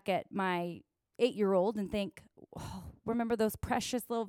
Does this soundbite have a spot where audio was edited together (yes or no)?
no